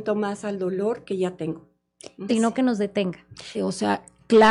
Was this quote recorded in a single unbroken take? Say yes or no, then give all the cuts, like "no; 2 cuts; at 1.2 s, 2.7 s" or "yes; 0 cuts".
no; 2 cuts; at 2.3 s, 3.5 s